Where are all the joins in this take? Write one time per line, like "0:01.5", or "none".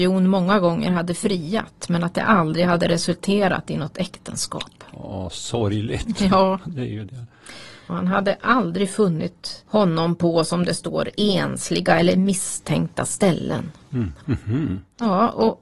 0:07.9
0:14.2